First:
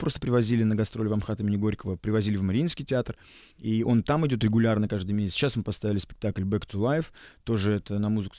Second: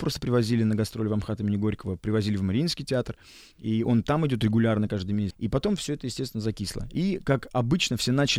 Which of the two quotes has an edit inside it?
second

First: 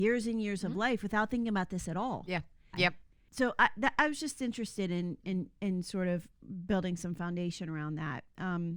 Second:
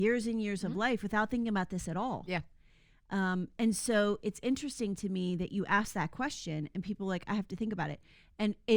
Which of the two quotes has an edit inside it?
first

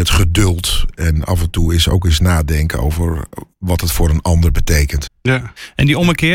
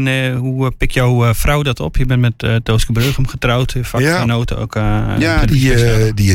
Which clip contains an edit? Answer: first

